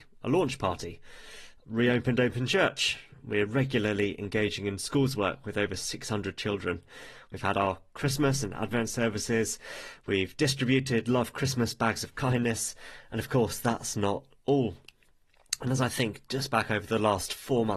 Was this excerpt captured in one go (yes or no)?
yes